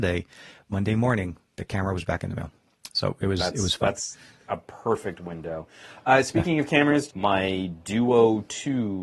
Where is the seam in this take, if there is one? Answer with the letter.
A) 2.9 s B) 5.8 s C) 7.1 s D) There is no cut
C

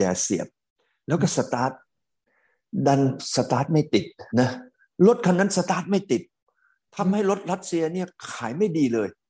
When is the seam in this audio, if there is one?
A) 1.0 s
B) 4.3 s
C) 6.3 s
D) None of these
B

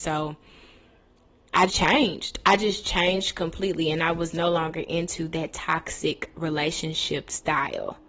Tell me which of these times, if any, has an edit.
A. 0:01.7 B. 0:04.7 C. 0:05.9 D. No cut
A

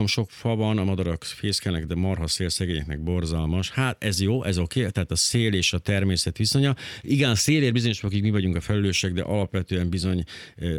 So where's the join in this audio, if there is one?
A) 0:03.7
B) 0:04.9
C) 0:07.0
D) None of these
D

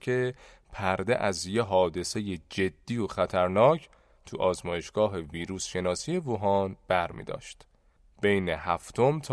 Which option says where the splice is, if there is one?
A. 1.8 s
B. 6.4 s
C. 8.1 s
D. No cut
D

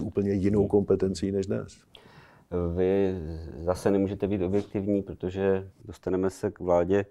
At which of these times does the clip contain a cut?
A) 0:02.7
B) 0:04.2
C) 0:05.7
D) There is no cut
C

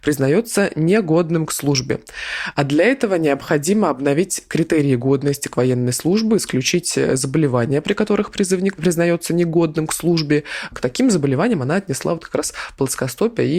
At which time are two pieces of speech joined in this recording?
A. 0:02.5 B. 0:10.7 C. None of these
A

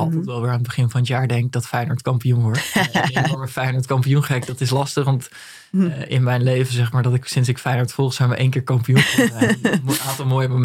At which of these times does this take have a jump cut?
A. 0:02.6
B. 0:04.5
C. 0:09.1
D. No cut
D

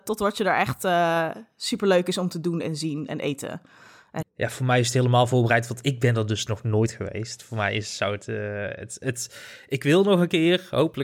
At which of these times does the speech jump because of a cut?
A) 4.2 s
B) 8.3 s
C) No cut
A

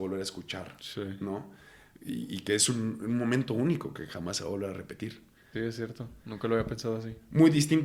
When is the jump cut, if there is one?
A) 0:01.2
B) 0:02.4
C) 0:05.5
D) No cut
C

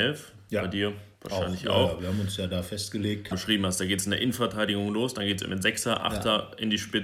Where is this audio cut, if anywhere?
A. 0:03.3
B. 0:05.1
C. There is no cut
A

